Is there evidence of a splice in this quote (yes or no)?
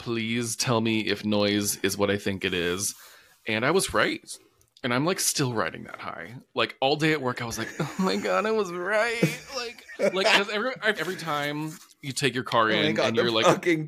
yes